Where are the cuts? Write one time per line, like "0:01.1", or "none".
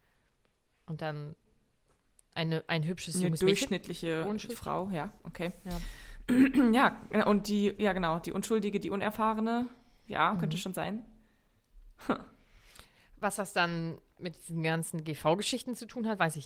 none